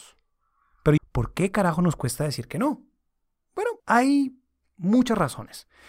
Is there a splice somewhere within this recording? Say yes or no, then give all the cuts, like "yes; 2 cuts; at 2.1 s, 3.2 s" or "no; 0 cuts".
yes; 2 cuts; at 1.0 s, 3.8 s